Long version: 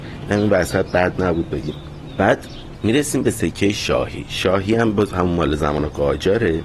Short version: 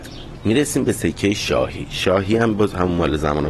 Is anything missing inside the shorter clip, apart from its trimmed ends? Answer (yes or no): no